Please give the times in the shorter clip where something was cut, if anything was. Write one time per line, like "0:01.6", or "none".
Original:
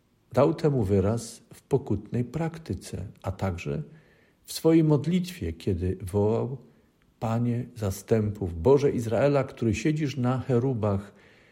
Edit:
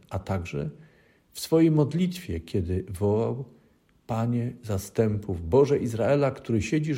none